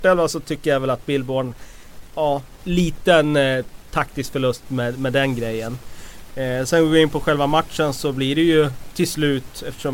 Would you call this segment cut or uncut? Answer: uncut